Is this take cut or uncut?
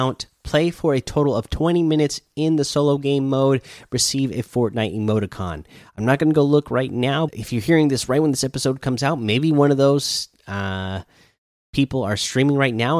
cut